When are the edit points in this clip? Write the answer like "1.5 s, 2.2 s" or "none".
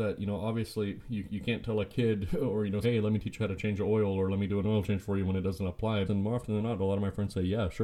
2.8 s, 6.1 s